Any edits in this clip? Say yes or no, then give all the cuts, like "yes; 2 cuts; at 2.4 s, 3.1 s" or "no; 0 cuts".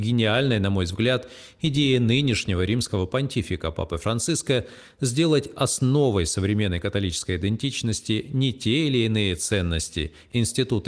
no; 0 cuts